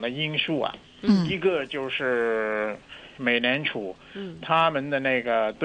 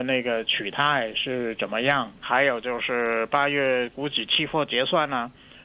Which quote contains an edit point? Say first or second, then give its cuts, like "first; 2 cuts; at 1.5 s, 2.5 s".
second; 1 cut; at 2.2 s